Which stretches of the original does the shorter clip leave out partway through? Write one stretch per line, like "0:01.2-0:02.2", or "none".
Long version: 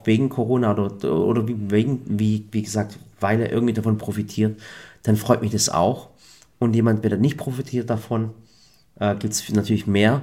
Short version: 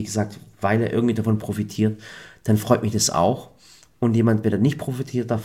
none